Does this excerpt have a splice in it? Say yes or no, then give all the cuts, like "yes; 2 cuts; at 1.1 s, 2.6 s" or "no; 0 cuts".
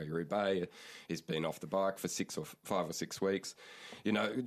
no; 0 cuts